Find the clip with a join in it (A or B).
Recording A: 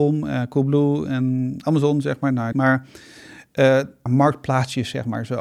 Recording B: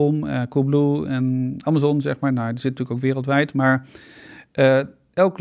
A